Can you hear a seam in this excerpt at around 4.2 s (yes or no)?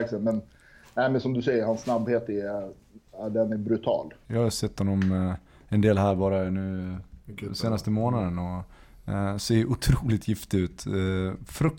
yes